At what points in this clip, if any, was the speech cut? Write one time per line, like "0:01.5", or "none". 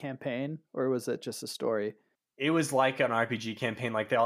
none

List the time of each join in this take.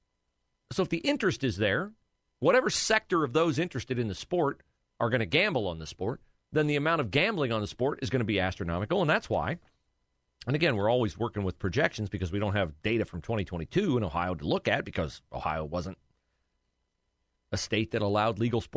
none

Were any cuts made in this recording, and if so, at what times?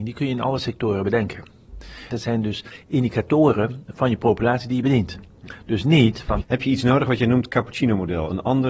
0:02.1
0:06.4

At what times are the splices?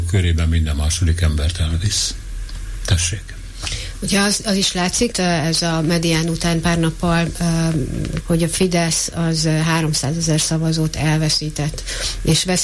0:05.1
0:08.2

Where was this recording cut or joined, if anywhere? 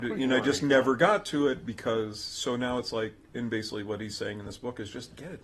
none

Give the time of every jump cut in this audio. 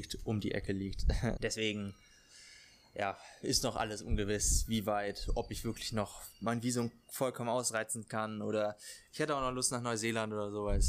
0:01.4

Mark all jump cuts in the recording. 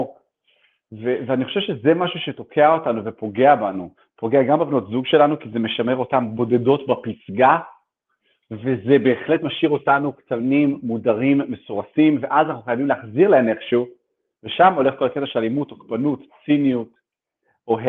none

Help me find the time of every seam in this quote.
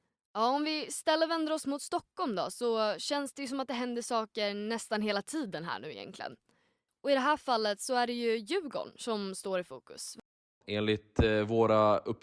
none

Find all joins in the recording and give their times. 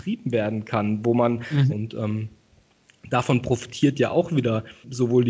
0:01.7

